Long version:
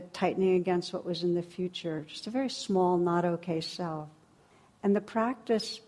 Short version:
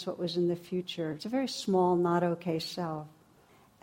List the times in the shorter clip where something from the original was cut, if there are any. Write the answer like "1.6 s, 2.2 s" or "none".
1.2 s